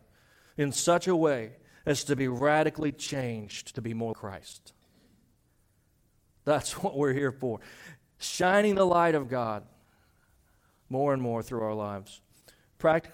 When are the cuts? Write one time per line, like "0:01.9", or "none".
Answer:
0:04.1

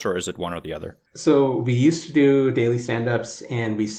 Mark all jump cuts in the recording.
0:01.1

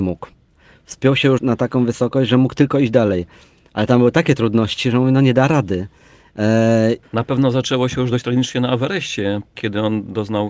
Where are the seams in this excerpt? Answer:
0:01.4
0:07.0
0:09.5

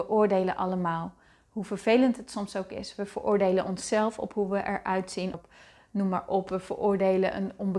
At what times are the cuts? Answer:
0:05.3

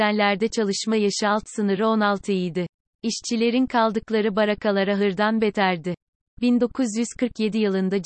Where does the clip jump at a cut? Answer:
none

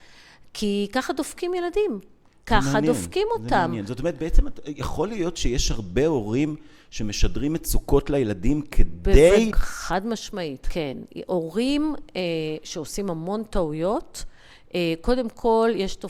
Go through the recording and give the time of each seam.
0:09.5
0:10.6

